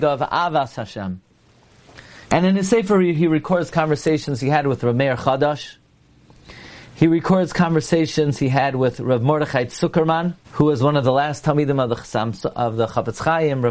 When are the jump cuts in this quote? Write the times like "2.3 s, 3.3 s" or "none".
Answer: 2.2 s, 10.4 s